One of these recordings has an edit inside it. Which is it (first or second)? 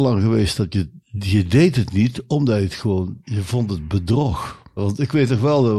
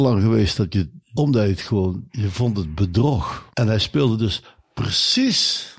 second